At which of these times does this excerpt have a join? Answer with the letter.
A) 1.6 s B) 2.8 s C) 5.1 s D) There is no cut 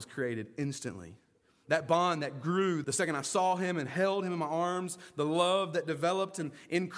B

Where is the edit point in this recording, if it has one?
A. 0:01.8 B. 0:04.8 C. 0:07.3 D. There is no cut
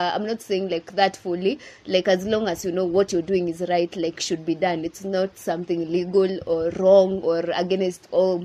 D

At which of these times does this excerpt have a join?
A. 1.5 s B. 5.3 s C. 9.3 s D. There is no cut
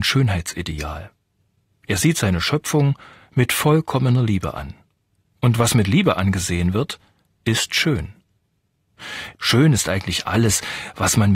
C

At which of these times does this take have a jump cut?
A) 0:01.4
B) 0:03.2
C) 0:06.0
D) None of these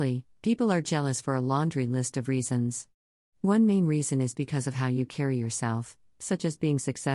D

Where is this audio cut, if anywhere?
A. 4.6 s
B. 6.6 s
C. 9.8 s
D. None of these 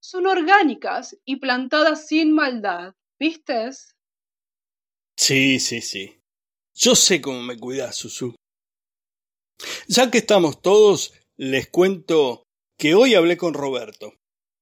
B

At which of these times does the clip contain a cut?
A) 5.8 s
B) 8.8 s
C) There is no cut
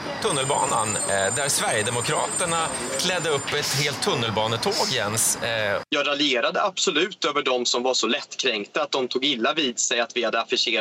A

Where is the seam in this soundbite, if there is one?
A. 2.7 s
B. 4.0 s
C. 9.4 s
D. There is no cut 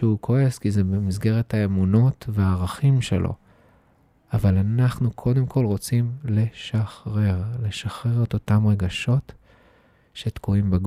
D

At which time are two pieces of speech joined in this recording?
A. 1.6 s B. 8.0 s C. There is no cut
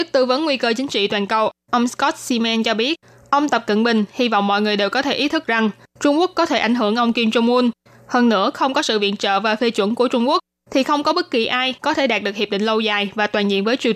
C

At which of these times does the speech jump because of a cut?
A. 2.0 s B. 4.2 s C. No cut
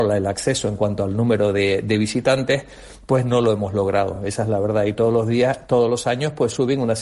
C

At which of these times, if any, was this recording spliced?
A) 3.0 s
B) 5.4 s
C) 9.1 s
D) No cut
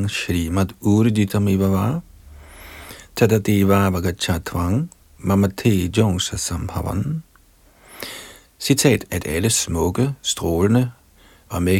C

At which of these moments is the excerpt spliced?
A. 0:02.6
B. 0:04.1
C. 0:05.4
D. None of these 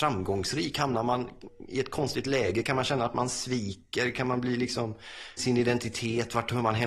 C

